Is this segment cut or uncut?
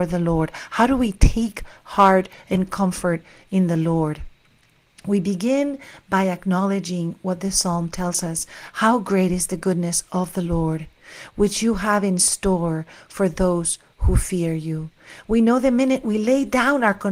uncut